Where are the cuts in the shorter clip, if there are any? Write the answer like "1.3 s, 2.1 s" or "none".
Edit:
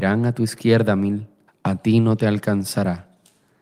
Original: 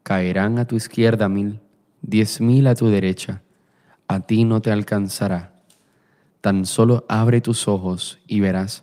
1.5 s